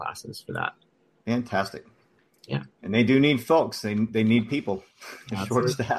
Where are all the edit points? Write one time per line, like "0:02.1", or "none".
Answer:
none